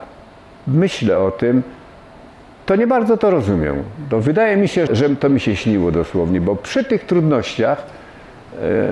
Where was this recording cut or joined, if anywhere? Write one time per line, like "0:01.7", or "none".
0:04.9